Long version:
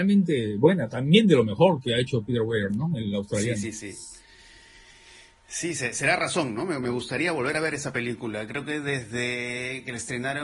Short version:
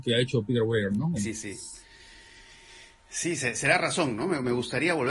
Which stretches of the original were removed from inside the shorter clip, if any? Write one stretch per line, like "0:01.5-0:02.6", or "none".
0:03.0-0:03.5